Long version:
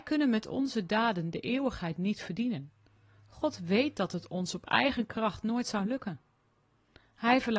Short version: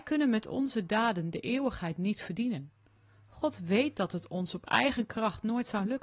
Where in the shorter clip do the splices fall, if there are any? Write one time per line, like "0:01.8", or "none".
none